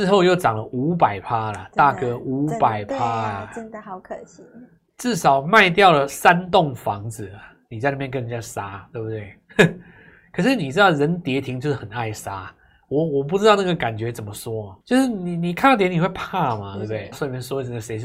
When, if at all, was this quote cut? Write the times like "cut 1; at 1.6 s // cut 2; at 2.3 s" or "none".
cut 1; at 14.8 s // cut 2; at 17.1 s